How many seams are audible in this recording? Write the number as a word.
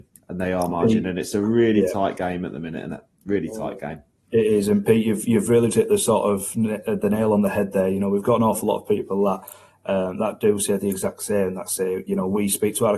one